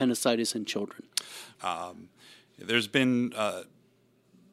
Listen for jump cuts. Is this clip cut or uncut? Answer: cut